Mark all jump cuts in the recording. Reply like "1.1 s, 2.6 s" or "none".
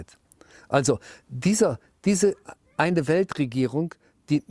none